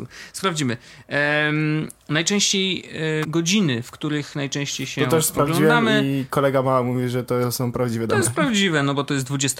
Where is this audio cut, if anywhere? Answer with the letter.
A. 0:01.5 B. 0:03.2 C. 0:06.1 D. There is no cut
B